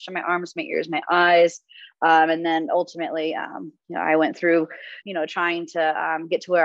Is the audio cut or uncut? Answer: cut